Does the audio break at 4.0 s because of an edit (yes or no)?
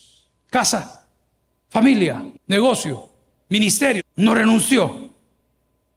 yes